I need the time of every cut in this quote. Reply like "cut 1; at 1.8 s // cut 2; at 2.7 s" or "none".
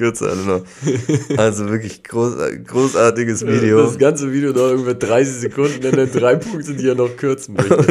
none